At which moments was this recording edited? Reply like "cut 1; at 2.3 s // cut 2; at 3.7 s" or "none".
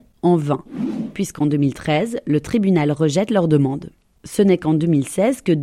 none